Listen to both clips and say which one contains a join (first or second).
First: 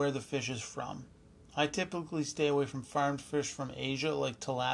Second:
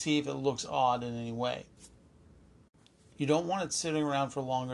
second